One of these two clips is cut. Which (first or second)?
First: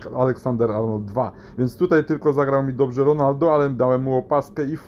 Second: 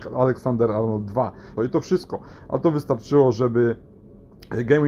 second